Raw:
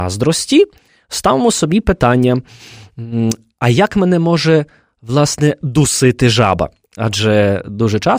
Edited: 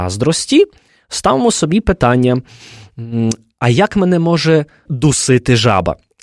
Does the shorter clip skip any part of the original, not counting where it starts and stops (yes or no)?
yes